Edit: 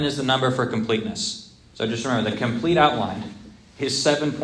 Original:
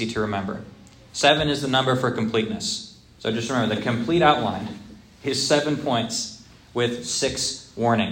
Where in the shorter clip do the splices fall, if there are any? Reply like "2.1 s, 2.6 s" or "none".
none